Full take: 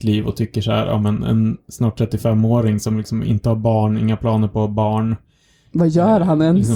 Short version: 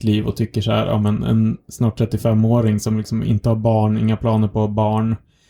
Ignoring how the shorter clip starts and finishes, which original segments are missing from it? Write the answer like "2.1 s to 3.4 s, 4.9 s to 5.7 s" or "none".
none